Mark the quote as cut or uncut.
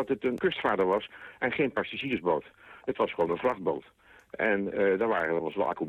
uncut